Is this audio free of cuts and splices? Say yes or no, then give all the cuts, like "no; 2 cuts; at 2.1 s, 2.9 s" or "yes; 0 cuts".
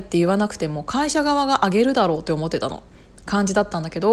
no; 1 cut; at 3.2 s